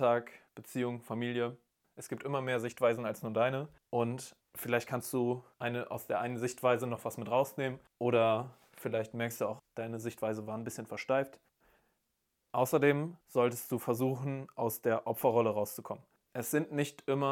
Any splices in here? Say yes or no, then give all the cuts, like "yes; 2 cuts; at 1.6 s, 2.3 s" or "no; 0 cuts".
yes; 1 cut; at 9.6 s